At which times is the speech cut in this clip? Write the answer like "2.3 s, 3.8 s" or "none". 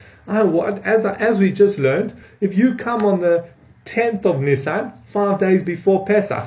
none